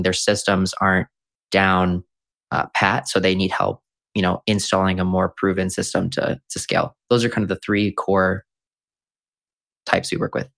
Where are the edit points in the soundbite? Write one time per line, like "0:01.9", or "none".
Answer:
none